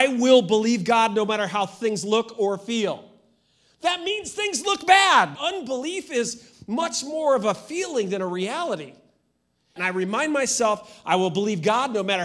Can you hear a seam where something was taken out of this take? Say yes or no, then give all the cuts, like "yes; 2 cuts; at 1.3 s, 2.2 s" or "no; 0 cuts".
yes; 2 cuts; at 5.4 s, 9.8 s